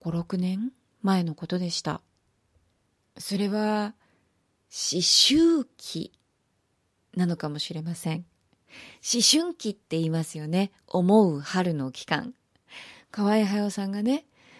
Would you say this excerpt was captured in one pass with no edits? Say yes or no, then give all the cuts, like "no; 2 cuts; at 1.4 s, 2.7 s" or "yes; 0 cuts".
yes; 0 cuts